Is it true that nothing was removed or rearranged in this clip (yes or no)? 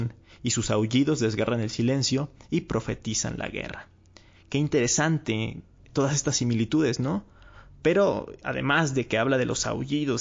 no